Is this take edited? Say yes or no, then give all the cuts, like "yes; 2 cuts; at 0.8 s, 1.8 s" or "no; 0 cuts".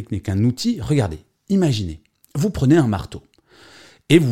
no; 0 cuts